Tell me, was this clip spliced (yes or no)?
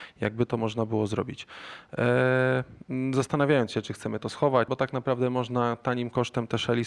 yes